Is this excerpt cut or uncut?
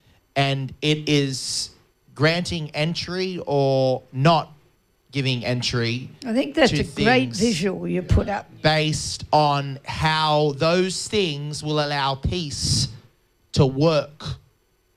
uncut